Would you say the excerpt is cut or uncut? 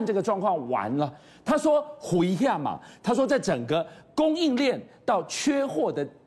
uncut